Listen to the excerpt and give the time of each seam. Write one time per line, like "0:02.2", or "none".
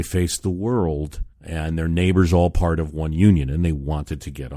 0:01.3